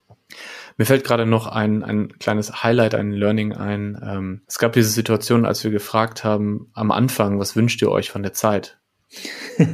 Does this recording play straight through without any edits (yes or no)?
no